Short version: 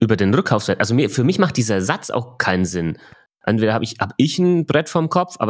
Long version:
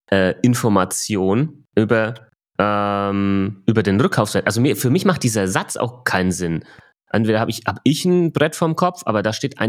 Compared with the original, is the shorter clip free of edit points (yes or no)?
yes